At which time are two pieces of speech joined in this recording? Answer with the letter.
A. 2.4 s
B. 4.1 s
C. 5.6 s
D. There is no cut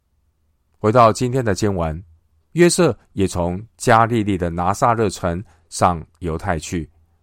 A